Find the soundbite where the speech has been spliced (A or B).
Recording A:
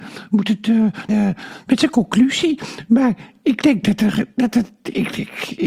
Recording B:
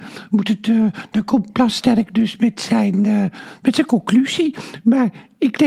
A